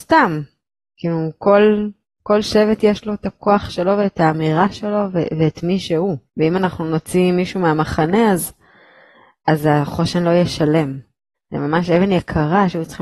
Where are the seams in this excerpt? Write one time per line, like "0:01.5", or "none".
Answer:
0:06.3
0:11.3

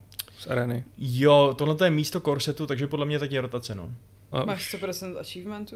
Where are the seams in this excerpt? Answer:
0:04.3

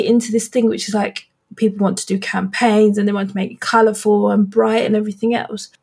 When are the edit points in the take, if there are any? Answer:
0:01.5

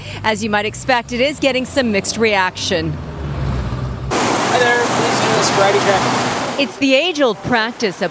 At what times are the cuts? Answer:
none

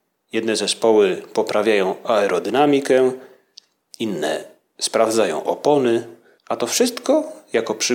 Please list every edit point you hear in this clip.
0:06.4

